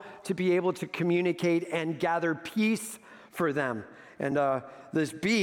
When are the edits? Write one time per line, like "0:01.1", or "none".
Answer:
none